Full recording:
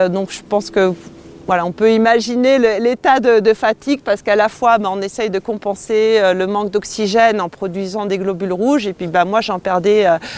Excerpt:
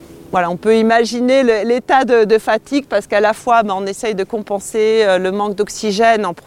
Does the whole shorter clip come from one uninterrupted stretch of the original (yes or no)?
yes